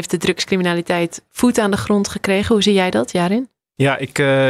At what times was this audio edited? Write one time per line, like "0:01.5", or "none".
none